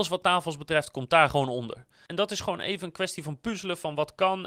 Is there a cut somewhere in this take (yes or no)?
yes